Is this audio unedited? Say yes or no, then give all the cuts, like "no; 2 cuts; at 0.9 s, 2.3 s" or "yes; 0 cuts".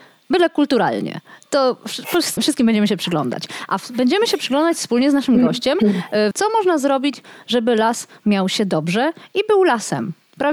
no; 2 cuts; at 2.4 s, 6.3 s